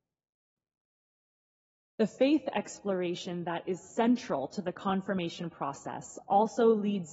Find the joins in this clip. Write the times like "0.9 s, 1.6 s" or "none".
none

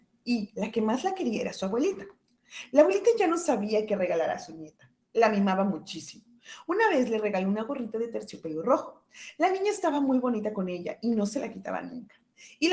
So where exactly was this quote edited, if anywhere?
none

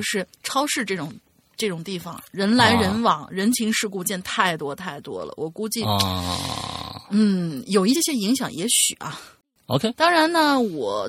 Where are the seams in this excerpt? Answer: 7.9 s

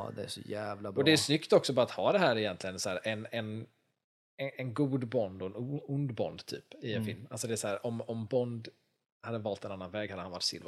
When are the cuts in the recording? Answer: none

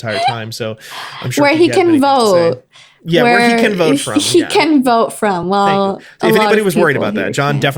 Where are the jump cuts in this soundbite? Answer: none

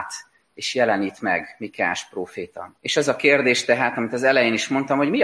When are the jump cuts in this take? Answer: 2.8 s

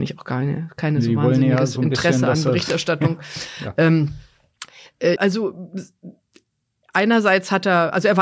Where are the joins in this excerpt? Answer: 5.2 s

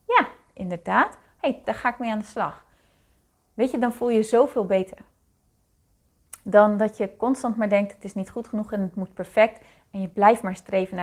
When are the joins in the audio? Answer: 1.6 s

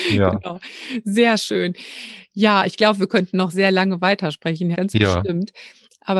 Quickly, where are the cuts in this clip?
3.5 s, 4.7 s

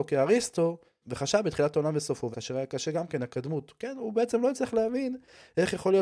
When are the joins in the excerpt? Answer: 1.0 s, 2.3 s

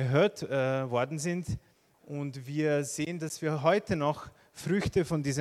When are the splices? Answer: 1.9 s

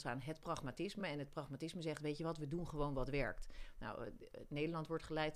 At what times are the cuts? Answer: none

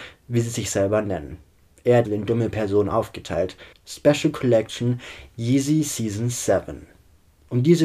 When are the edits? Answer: 2.0 s, 3.7 s

